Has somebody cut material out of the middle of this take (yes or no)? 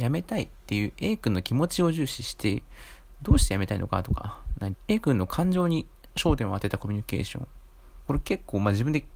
yes